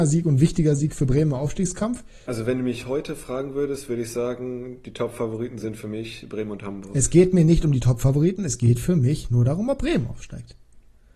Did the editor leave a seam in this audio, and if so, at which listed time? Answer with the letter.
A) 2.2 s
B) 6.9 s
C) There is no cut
A